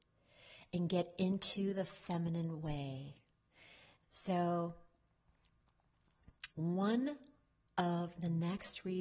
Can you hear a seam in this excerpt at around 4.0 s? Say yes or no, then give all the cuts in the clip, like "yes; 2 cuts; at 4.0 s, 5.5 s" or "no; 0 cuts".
yes; 2 cuts; at 4.0 s, 6.5 s